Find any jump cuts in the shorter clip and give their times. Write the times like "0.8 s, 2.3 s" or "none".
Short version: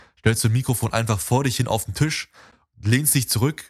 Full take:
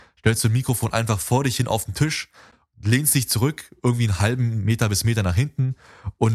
none

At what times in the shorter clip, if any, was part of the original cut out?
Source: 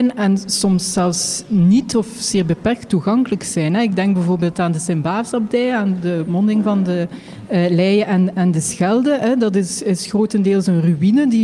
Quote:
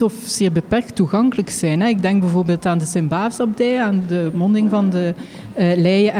none

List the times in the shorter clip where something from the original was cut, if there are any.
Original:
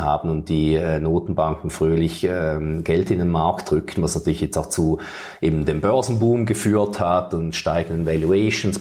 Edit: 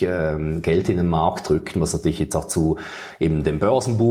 none

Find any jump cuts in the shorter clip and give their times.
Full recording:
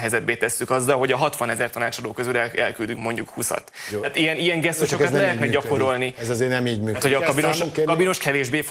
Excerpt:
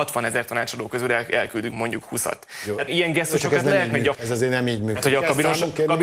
2.9 s, 4.1 s

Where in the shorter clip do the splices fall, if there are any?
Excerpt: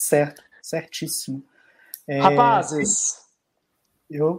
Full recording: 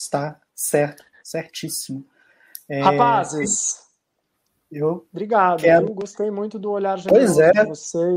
none

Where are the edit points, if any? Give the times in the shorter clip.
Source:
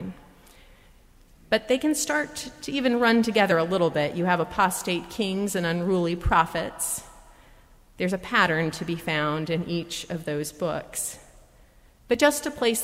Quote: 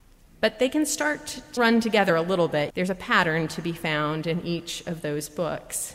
1.6 s, 2.7 s

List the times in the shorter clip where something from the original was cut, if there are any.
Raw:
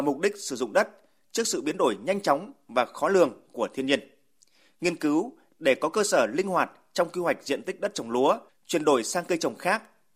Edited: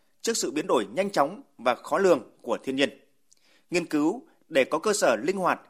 none

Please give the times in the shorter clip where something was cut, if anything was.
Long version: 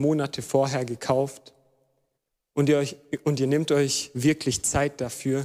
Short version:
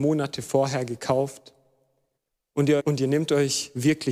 2.8 s

